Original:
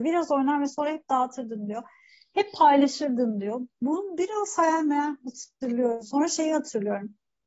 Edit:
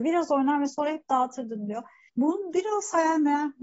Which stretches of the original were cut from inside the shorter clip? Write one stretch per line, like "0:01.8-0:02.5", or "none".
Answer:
0:02.1-0:03.7